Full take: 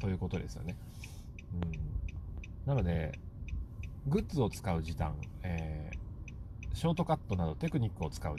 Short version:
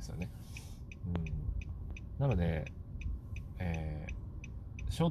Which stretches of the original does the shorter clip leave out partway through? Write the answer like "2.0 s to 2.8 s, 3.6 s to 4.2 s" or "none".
4.0 s to 5.4 s